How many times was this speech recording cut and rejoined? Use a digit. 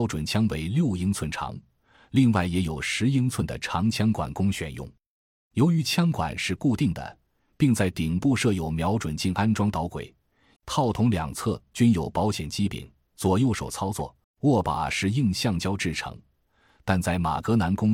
2